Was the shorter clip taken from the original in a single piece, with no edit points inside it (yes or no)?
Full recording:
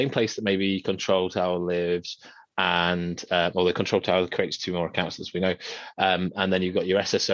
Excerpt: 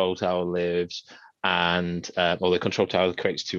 yes